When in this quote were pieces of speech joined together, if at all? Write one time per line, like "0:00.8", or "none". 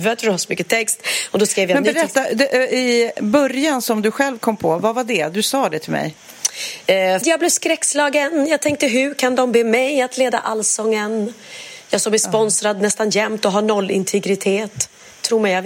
0:07.2